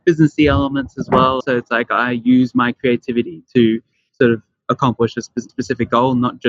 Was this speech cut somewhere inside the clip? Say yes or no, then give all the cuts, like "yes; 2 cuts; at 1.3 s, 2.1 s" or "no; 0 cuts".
yes; 2 cuts; at 1.4 s, 5.5 s